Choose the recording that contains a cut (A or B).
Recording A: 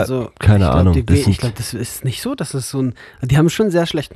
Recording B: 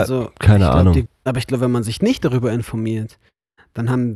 B